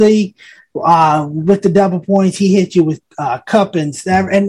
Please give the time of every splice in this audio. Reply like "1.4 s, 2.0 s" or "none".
none